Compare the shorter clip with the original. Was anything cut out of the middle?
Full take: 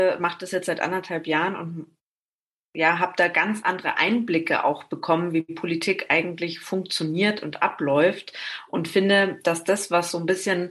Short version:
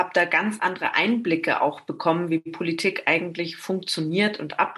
no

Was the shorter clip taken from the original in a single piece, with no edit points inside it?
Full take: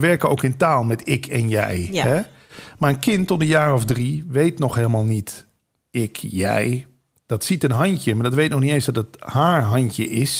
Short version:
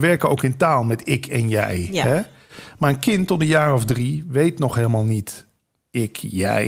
yes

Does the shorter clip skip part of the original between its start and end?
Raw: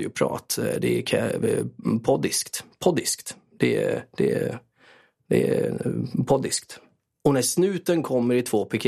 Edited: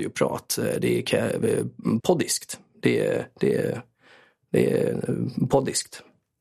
yes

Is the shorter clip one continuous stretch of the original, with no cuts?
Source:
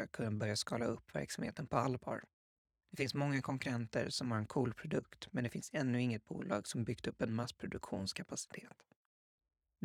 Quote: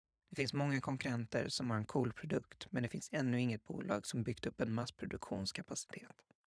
yes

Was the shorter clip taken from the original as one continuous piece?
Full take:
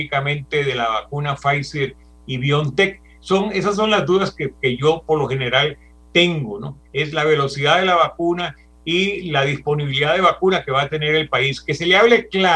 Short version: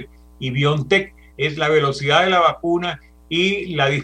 no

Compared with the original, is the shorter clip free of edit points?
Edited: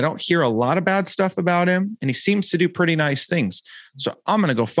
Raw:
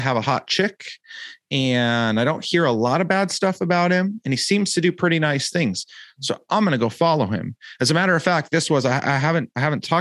yes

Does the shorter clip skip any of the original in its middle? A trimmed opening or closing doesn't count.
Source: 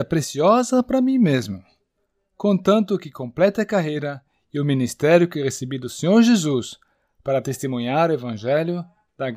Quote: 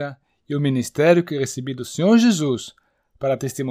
no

